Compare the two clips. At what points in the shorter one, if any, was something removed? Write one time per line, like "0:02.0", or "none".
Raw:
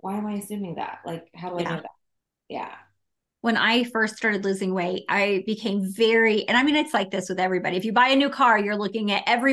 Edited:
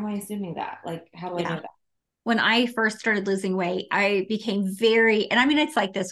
0:02.0